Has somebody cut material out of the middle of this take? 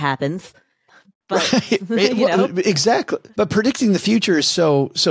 yes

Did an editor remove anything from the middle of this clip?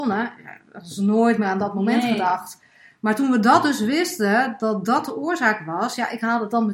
no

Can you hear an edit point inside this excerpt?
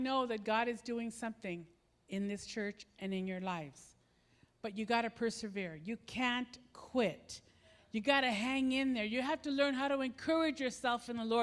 no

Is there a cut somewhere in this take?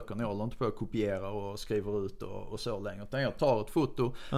no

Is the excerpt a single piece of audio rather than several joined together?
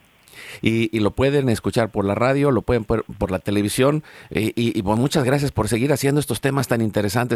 yes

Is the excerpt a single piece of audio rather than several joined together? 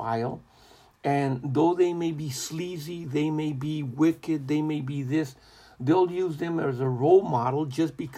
yes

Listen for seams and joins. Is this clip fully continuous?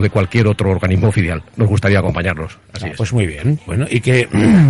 yes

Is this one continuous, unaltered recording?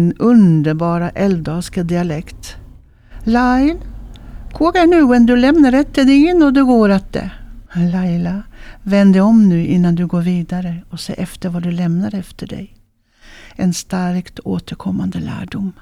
no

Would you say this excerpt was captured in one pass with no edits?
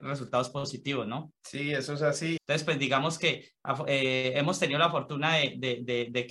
no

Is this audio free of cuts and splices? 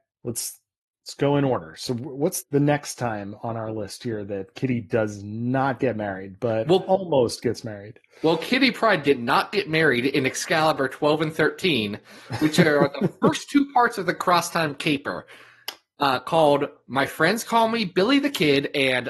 no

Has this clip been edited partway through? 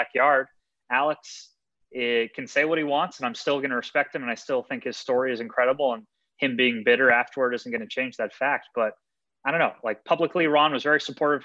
no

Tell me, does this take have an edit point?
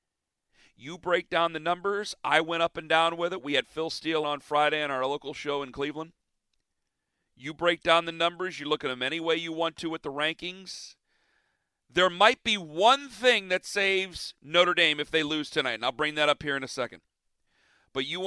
yes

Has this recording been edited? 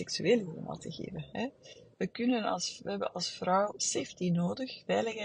no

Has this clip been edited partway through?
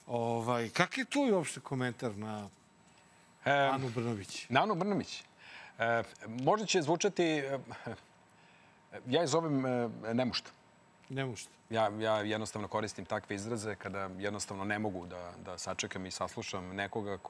yes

